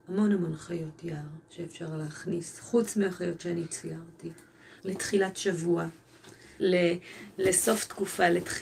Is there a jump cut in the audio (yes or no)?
yes